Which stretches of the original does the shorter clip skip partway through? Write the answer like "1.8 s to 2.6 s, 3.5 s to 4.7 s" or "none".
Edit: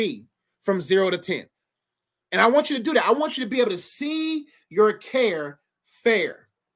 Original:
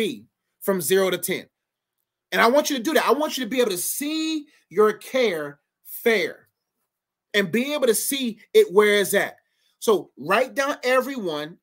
none